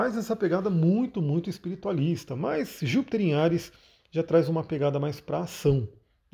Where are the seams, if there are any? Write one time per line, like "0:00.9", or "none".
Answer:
none